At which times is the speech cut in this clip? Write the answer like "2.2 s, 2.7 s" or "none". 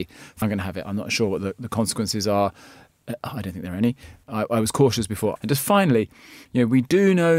4.2 s, 5.4 s